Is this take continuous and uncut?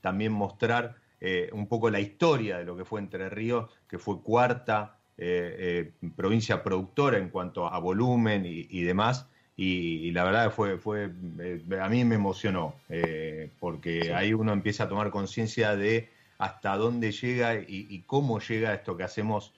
no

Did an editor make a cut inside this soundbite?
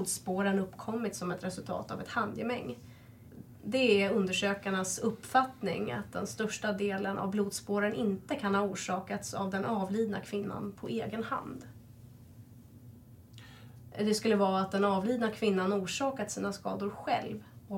yes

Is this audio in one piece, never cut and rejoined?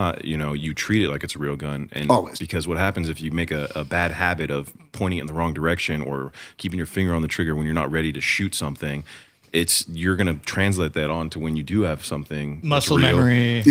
no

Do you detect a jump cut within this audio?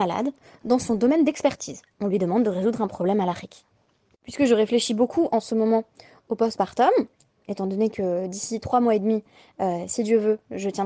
no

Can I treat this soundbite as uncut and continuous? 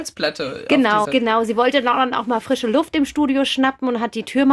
no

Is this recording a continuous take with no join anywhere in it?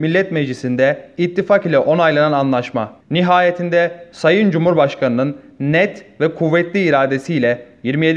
no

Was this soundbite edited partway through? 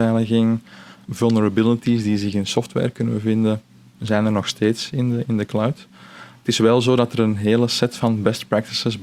yes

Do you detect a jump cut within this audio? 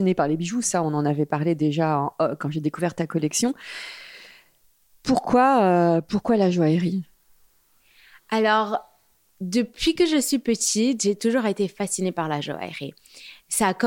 no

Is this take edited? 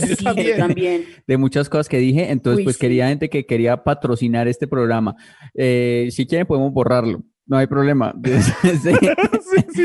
no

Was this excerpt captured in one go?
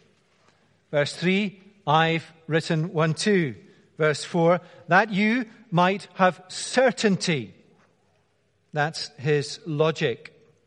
yes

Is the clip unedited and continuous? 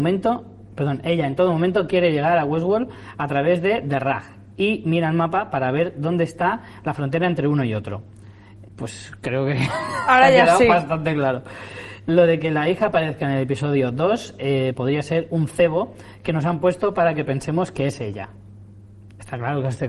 no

